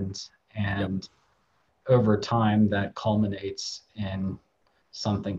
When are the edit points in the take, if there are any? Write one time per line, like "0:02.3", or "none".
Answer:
none